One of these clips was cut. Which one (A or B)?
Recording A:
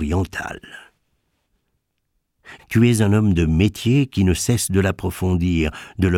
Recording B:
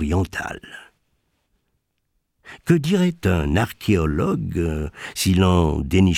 A